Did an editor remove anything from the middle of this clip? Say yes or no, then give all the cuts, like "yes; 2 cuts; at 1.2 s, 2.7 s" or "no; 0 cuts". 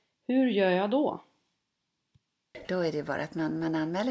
yes; 1 cut; at 2.7 s